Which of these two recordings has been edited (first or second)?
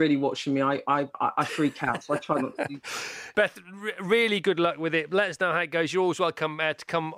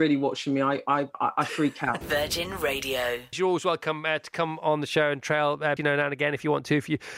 second